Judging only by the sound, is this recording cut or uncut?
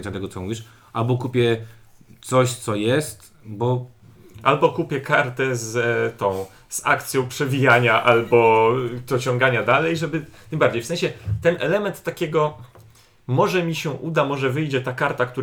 uncut